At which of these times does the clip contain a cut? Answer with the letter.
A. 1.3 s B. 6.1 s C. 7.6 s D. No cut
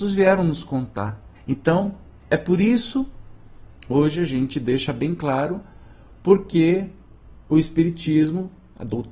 A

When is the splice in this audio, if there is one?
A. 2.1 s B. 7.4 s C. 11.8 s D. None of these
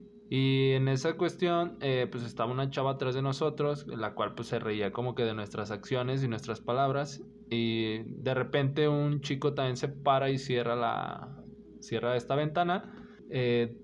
D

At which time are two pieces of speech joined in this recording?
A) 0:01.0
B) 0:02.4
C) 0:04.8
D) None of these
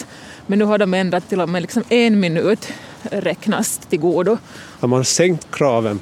C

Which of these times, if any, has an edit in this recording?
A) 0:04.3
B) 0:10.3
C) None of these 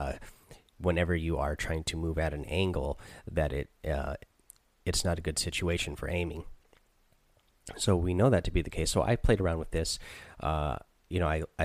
C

